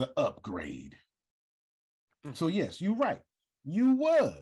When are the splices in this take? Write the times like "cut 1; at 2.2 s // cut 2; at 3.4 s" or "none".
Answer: none